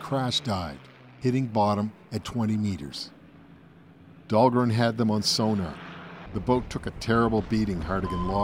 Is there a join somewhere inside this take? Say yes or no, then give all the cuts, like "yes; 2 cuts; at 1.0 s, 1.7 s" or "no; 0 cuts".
yes; 2 cuts; at 2.2 s, 6.3 s